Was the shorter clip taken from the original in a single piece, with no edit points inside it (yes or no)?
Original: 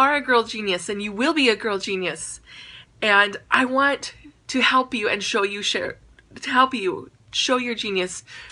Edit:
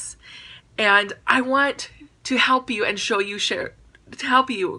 yes